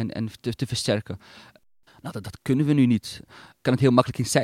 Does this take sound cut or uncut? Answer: cut